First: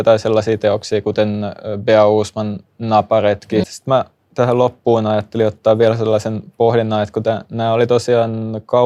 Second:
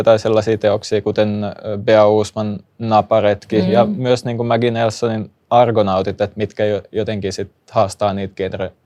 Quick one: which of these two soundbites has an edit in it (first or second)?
first